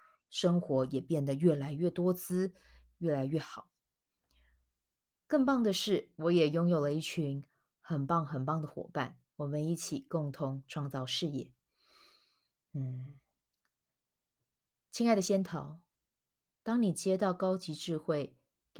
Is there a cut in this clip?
no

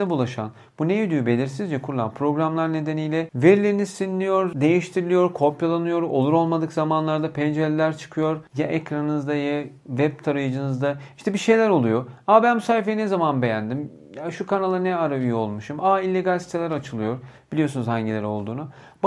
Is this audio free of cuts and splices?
yes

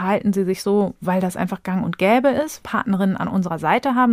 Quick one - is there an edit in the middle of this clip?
yes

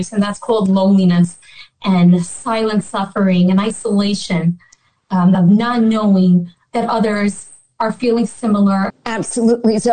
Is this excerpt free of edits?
no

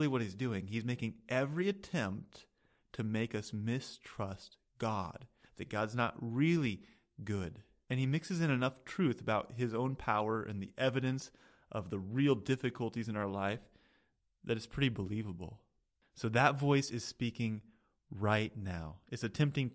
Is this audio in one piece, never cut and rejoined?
no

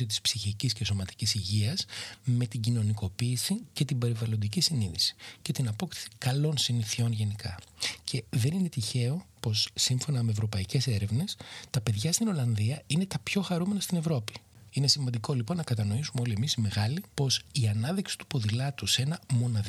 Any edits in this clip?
yes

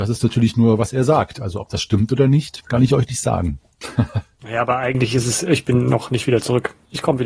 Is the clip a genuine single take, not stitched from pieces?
yes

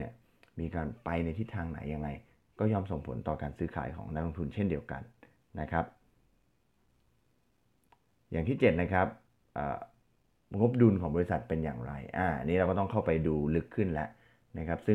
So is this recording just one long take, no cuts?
yes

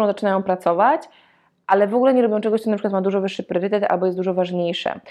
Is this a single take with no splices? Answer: yes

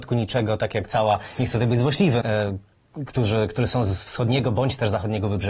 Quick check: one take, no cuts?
no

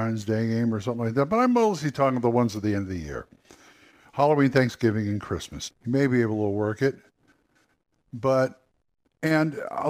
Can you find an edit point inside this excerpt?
yes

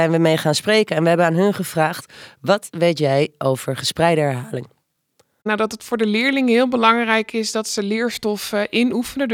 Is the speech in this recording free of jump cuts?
yes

